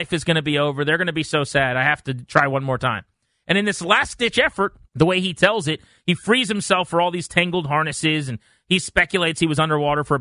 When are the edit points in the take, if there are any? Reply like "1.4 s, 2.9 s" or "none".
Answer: 4.9 s